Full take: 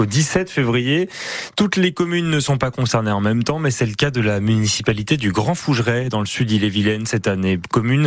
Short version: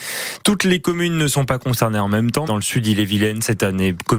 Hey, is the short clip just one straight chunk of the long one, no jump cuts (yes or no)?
no